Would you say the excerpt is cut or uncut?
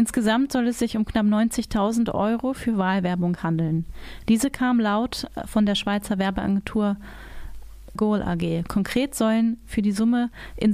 cut